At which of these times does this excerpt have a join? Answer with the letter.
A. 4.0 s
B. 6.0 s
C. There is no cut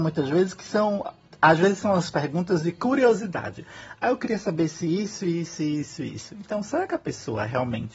B